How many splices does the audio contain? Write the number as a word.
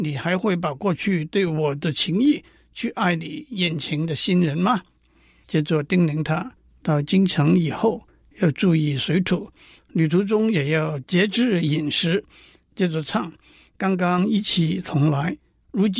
zero